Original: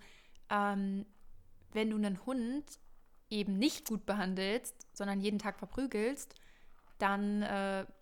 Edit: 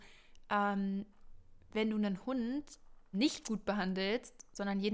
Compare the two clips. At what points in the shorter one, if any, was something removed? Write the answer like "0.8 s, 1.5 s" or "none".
3.1 s